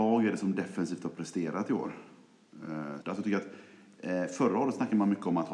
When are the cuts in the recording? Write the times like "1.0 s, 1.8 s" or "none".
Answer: 3.0 s